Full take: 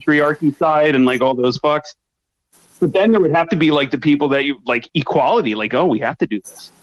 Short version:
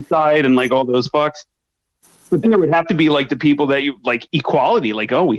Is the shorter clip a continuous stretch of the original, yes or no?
no